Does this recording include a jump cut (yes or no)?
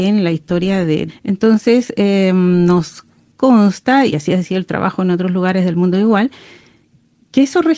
yes